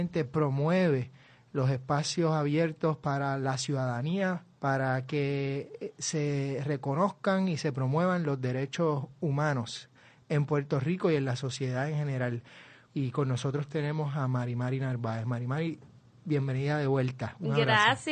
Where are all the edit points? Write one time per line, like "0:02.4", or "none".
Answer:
0:04.5
0:12.9

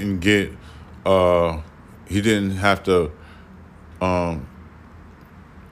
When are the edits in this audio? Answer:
none

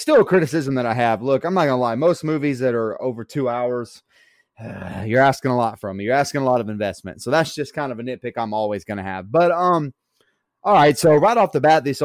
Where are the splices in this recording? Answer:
none

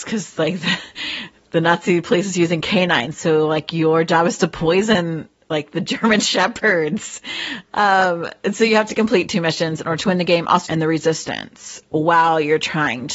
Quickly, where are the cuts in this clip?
0:10.7

